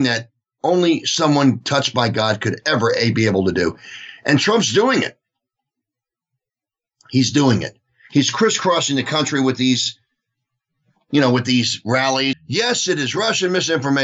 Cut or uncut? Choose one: cut